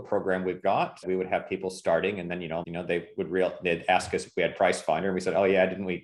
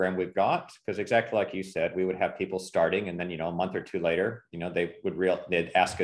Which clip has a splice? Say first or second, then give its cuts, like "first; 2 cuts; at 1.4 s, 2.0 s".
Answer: first; 2 cuts; at 1.0 s, 2.6 s